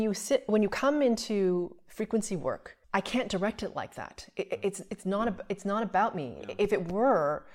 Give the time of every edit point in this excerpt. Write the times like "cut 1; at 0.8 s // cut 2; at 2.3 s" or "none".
cut 1; at 2.8 s